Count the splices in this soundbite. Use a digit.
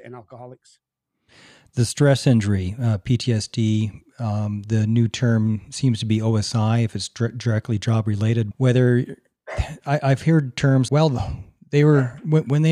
2